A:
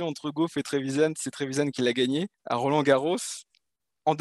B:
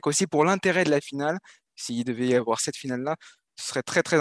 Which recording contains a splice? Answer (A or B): A